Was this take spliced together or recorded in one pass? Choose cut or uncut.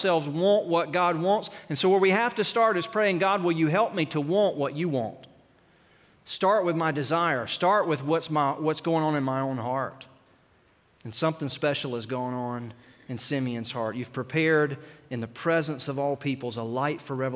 uncut